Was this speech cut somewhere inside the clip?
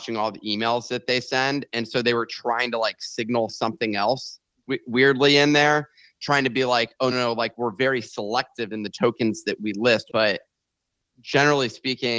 yes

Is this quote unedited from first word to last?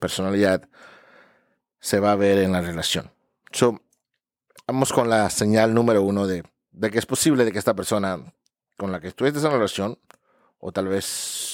yes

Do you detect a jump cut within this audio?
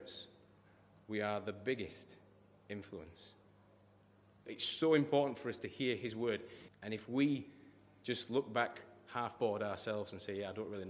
yes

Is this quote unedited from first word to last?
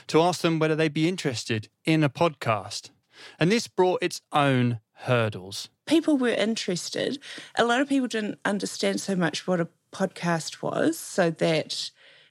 yes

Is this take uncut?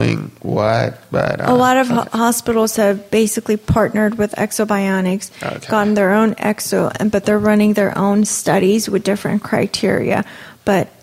yes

